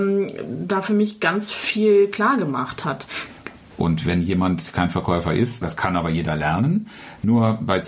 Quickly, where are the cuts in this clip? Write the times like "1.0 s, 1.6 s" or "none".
3.7 s, 5.6 s